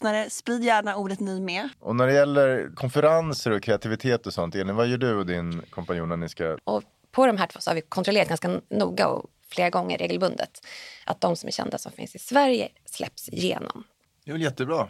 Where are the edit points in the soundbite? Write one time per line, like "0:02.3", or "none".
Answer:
0:01.7
0:06.6